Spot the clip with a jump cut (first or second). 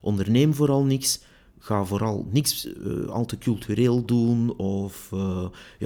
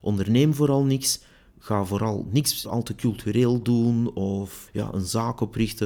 second